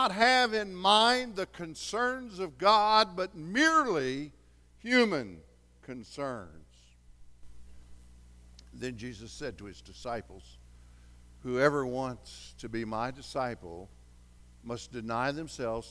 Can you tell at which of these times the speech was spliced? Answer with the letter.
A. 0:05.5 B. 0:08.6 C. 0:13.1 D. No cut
D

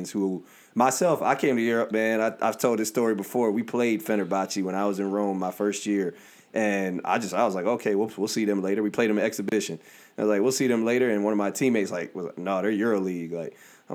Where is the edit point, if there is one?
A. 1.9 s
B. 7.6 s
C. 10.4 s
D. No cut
A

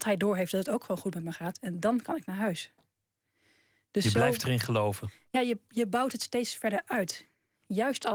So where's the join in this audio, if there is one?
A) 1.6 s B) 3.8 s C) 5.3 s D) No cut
D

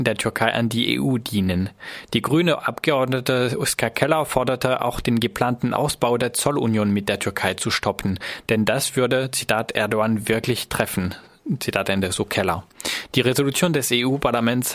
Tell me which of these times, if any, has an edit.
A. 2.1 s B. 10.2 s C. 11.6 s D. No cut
D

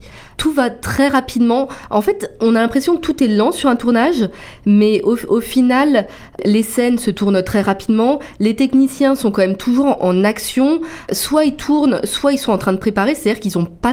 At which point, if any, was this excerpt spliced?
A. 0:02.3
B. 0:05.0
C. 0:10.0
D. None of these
C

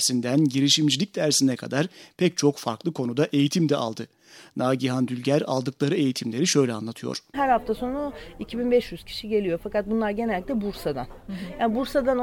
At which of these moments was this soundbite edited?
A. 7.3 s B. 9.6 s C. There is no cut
A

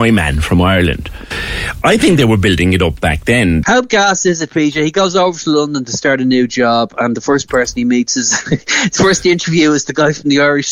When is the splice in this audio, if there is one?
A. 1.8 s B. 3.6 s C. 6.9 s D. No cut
B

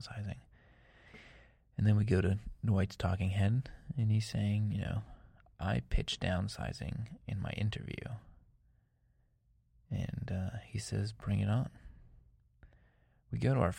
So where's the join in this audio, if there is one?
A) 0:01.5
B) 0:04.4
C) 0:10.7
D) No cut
D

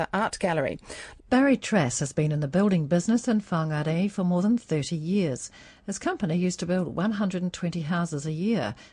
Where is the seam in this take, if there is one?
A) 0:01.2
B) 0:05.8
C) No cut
A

